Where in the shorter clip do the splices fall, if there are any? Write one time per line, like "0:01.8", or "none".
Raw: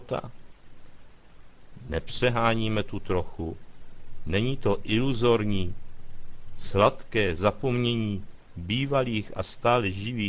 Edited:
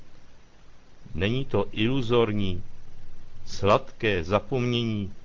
0:01.1